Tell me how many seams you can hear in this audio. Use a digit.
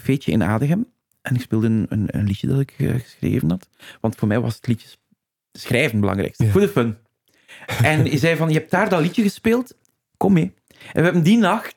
2